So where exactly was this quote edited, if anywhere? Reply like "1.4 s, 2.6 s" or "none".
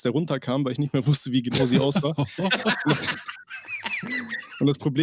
none